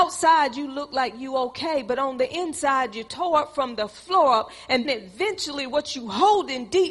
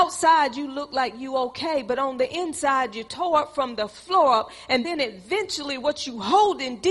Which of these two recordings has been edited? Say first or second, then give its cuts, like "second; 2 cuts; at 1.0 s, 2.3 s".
first; 1 cut; at 4.8 s